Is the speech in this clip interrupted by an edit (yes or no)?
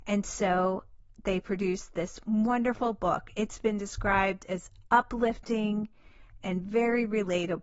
no